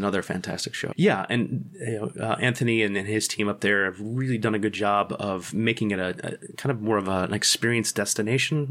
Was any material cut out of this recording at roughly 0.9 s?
yes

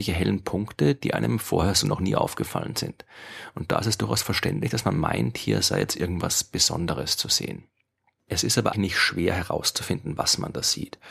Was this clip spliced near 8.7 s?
yes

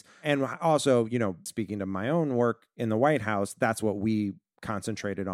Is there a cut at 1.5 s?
yes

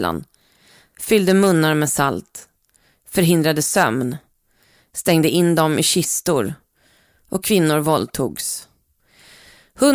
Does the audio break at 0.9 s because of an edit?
yes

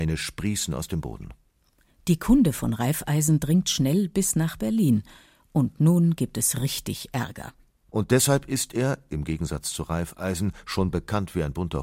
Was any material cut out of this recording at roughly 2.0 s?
no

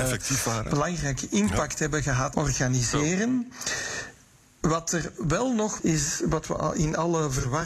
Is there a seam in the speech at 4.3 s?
no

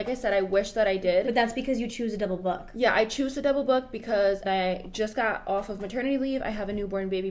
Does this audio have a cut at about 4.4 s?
yes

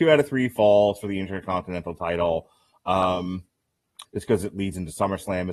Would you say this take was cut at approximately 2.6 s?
no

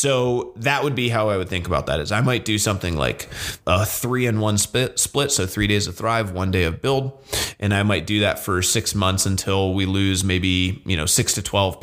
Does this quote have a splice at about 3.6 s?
yes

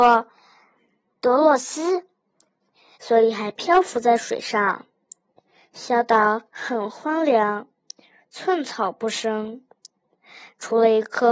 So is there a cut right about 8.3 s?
no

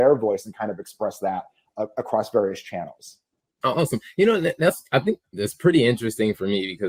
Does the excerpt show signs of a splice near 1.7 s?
no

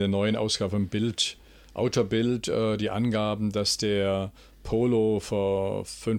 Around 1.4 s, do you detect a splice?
no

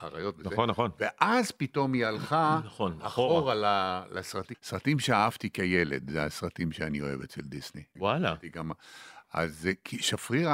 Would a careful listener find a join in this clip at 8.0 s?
yes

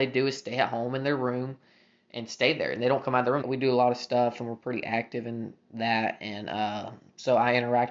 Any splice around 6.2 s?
no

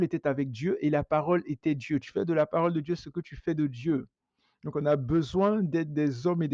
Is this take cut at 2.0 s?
yes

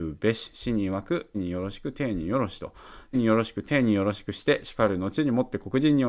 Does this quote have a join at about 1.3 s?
yes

